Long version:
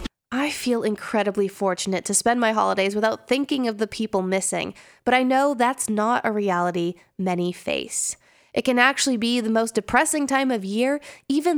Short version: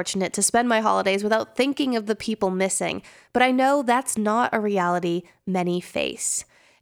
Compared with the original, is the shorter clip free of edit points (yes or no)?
yes